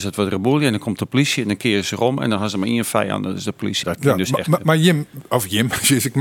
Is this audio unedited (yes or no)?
no